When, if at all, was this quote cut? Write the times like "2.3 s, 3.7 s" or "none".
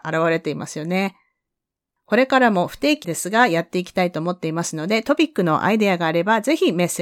2.0 s, 3.0 s